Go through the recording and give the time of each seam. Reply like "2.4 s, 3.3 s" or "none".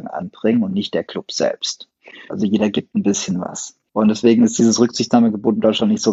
2.3 s, 3.9 s